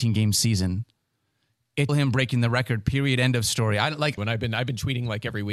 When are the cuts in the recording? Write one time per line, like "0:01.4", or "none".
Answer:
0:01.9
0:04.2